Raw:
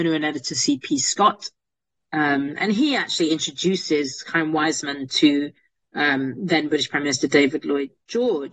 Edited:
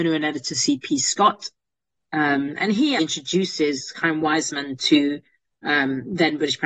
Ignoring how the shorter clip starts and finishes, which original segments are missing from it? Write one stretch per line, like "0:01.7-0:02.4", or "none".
0:03.0-0:03.3

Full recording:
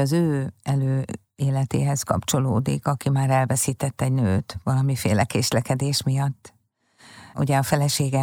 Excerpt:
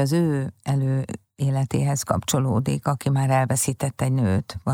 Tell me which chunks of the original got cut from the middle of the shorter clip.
none

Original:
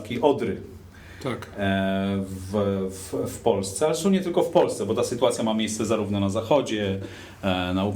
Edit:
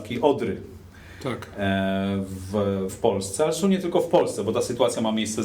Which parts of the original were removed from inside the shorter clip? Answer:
0:02.9-0:03.3

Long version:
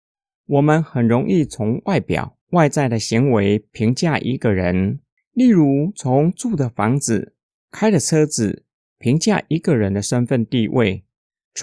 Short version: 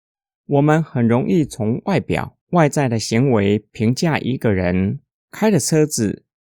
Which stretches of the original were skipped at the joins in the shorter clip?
0:05.1-0:07.5

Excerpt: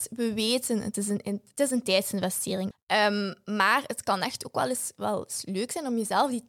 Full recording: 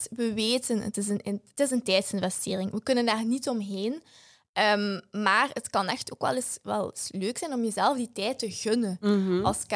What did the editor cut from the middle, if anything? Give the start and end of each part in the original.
0:02.7-0:04.4

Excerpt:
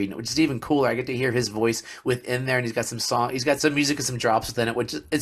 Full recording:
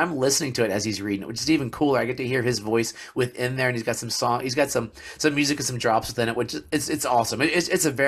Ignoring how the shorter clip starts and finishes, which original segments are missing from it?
0:04.7-0:05.2

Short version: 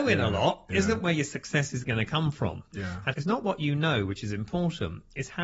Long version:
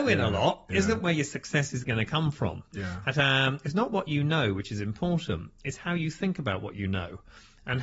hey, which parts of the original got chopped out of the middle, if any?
0:03.1-0:03.6

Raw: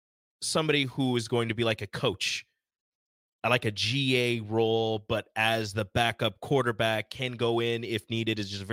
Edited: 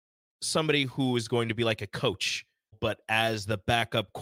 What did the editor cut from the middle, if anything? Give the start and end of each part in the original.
0:02.7-0:05.0

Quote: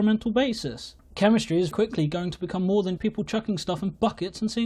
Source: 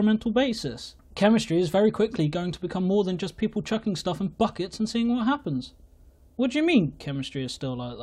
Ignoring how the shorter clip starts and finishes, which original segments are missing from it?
0:01.7-0:01.9
0:03.2-0:03.4

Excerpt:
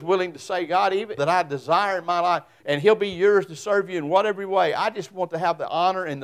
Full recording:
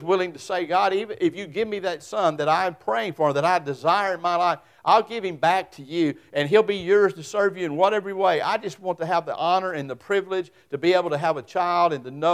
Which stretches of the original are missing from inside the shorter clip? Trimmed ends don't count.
0:01.2-0:03.3
0:04.8-0:06.3

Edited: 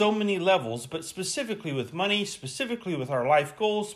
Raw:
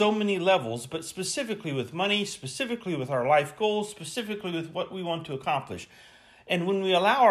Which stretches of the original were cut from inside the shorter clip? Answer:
none

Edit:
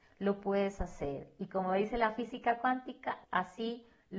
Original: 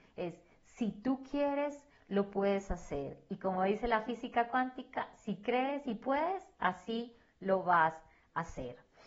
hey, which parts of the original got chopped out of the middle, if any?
0:05.1-0:06.5

